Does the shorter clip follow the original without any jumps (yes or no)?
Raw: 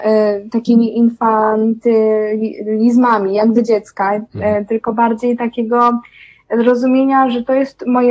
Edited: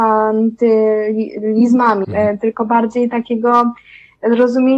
no